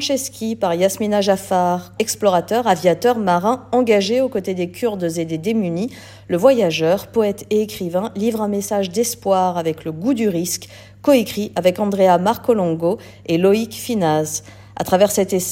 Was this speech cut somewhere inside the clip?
yes; 1 cut; at 2.0 s

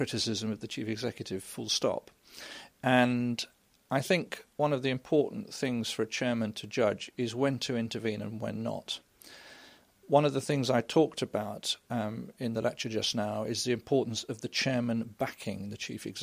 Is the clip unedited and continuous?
no; 1 cut; at 2.7 s

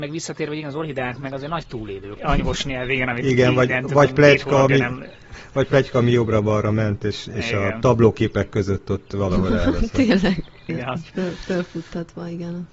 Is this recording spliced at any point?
yes; 2 cuts; at 2.2 s, 10.7 s

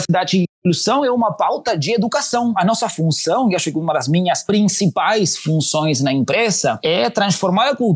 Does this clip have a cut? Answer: no; 0 cuts

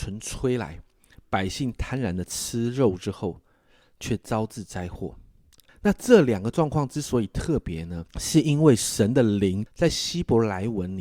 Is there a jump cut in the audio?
yes; 3 cuts; at 5.7 s, 8.1 s, 9.7 s

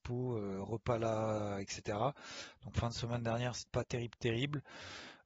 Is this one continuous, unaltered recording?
no; 1 cut; at 3.7 s

